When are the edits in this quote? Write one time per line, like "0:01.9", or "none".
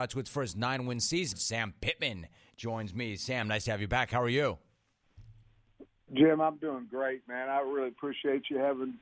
none